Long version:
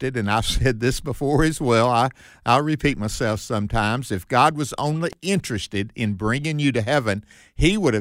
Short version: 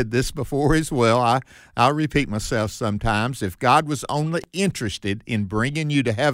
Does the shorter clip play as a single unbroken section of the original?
yes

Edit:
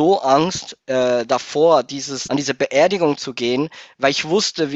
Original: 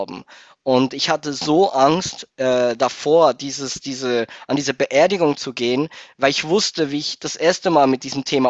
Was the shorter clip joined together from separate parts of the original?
yes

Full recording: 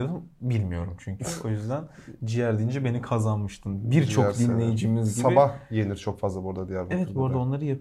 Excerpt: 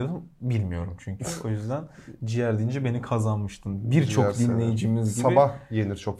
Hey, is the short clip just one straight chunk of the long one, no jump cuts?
yes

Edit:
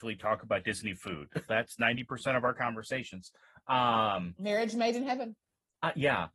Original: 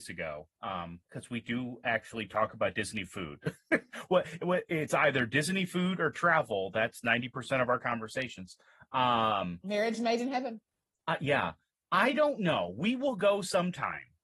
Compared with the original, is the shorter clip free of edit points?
no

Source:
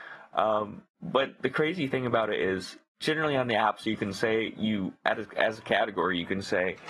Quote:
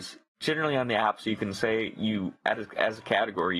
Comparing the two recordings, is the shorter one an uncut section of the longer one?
yes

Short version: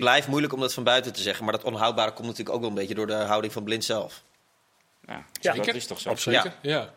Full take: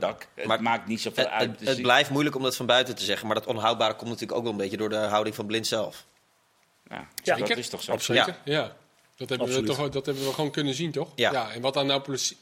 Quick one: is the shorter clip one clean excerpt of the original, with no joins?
yes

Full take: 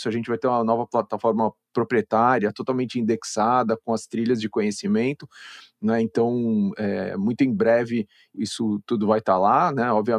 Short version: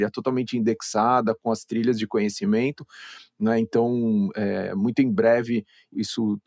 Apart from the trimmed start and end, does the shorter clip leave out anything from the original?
no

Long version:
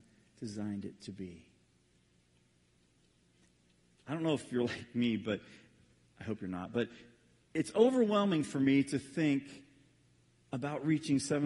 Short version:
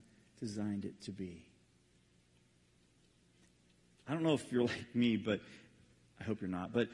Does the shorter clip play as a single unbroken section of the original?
yes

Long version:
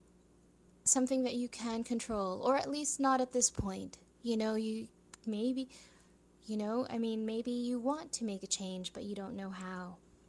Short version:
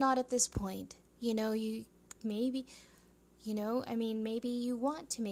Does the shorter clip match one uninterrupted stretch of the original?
yes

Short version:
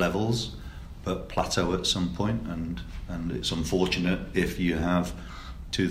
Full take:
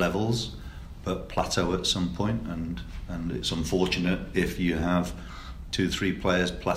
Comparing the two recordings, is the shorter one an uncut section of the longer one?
yes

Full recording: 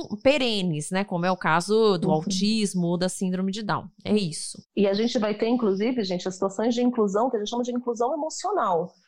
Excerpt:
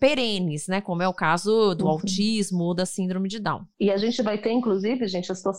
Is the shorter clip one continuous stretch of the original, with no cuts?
no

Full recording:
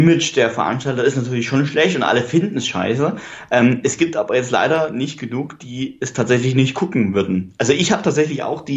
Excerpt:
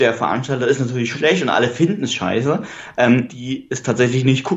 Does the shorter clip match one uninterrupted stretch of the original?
no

